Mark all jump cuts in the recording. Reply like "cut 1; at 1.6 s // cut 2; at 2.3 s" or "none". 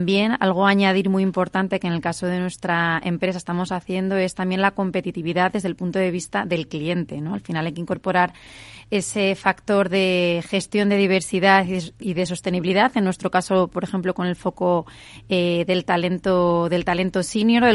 none